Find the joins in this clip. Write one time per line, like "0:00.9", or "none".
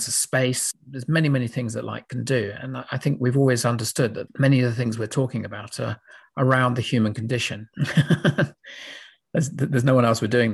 0:07.7